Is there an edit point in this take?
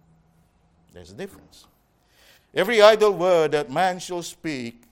yes; 1 cut; at 2.4 s

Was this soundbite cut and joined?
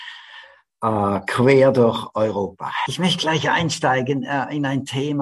yes; 1 cut; at 2.9 s

